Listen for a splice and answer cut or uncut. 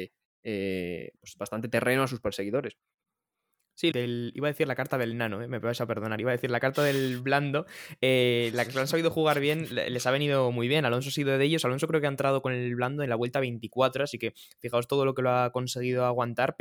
cut